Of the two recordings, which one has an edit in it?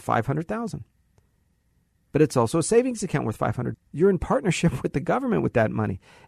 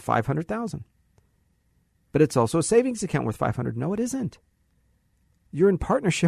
first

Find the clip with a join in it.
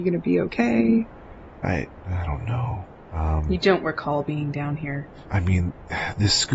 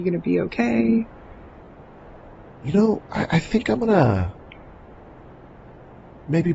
first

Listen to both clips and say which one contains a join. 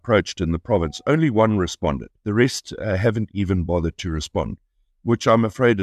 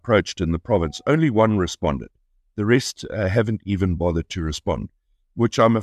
first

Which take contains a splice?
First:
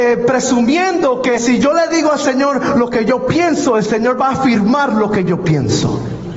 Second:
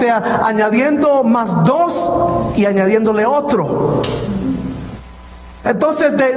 first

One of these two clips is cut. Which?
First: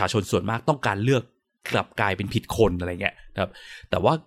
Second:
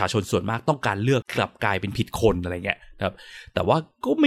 second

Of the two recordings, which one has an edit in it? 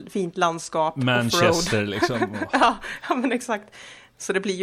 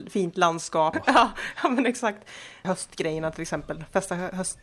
second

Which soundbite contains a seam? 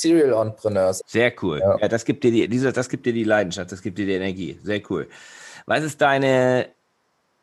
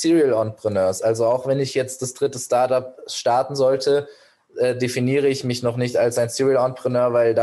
first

